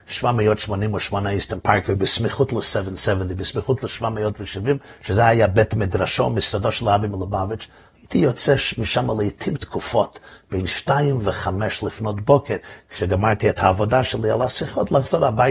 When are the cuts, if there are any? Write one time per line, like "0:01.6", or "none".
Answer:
none